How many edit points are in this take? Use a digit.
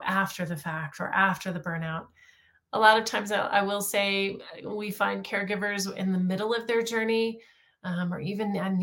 0